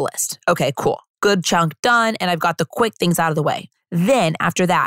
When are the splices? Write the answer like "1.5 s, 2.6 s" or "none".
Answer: none